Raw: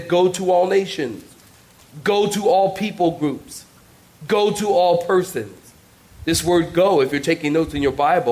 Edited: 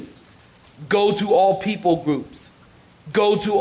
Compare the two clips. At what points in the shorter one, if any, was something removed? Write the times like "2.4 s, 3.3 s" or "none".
none